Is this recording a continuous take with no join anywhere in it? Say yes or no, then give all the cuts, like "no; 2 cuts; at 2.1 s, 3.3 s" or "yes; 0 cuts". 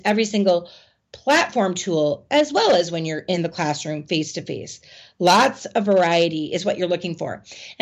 yes; 0 cuts